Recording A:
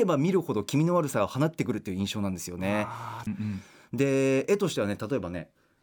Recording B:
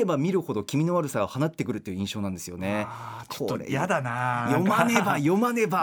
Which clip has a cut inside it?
A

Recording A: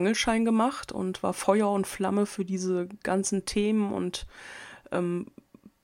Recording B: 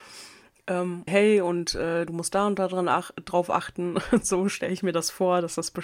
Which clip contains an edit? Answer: B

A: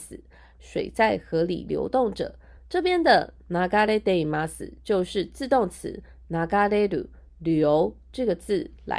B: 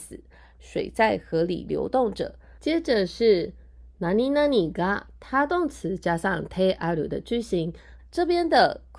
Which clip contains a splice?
B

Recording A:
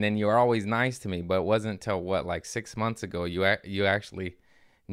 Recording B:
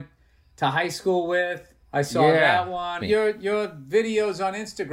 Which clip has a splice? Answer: B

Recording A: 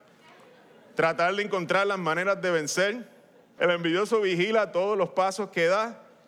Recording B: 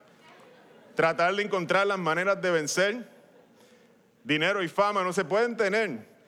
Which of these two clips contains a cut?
A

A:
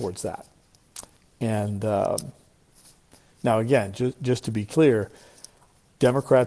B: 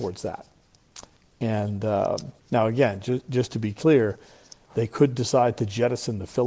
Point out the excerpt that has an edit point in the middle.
B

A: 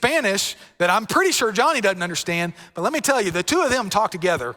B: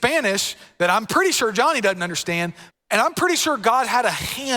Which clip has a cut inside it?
B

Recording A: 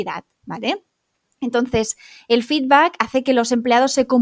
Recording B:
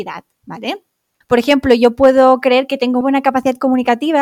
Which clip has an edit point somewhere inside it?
B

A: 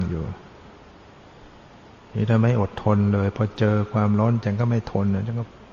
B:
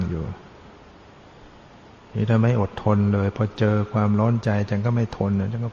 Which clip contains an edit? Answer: A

